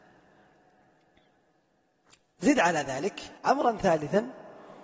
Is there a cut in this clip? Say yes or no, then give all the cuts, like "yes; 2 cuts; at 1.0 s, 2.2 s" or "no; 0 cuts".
yes; 1 cut; at 3.4 s